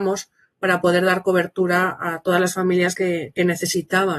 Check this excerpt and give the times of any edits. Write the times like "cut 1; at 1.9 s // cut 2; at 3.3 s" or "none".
none